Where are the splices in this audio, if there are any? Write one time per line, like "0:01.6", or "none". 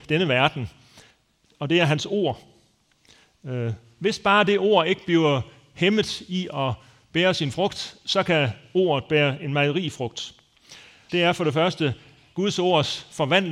0:11.1